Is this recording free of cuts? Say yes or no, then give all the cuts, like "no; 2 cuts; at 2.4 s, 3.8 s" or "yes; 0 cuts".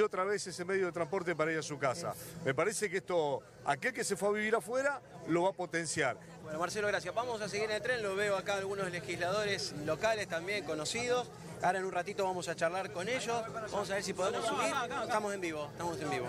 no; 1 cut; at 6.4 s